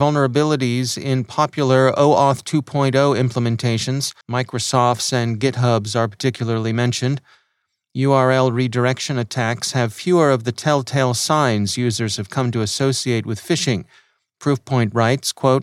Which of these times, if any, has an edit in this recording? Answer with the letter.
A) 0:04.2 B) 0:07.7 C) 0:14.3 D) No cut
A